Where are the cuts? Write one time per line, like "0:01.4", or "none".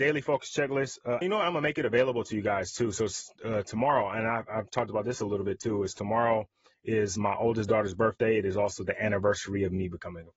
0:01.2